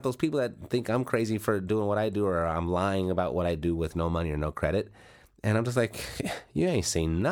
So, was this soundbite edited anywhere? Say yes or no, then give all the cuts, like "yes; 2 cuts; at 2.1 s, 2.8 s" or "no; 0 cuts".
no; 0 cuts